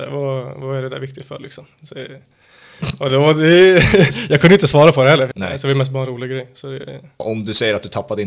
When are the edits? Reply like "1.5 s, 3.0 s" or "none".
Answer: 5.3 s, 7.2 s